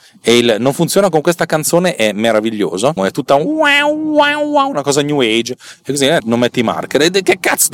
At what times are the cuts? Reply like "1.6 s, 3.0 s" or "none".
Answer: 3.0 s, 6.2 s